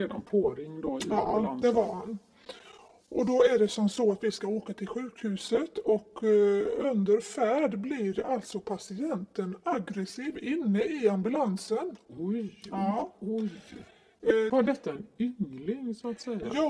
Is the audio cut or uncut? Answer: cut